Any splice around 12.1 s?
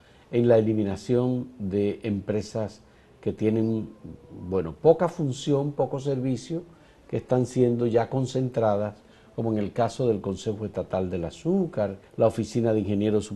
yes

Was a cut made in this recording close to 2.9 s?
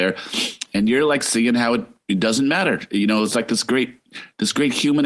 no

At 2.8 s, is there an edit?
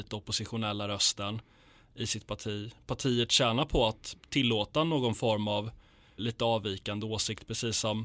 no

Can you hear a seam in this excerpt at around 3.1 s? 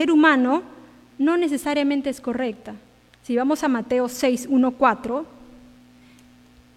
yes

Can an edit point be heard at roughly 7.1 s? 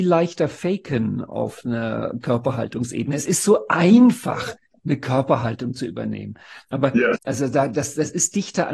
yes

